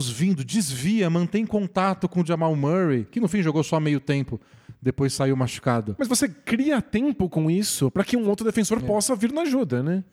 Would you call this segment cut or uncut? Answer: uncut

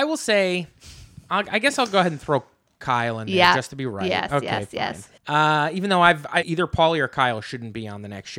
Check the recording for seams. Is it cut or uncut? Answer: cut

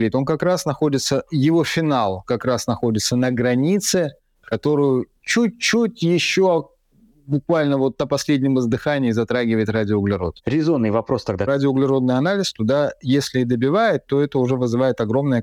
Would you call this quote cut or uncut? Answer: cut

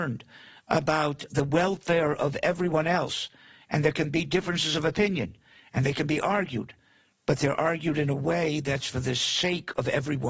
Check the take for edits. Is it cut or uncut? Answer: uncut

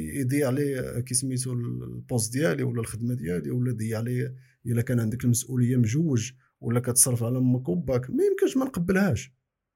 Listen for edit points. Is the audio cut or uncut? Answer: uncut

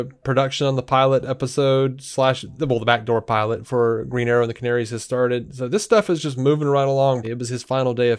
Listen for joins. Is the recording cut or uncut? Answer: cut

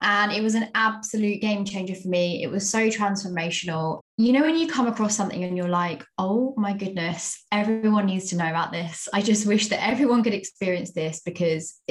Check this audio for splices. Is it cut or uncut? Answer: uncut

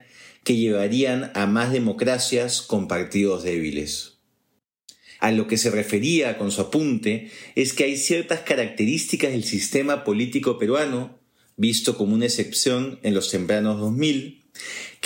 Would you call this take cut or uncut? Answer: cut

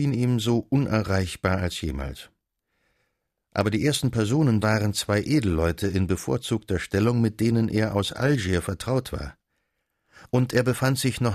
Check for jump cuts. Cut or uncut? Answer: cut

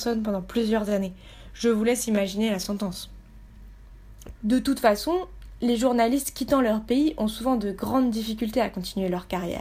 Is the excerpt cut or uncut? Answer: cut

